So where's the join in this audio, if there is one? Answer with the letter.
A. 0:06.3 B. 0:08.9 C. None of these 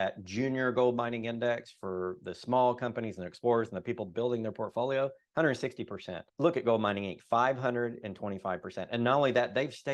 A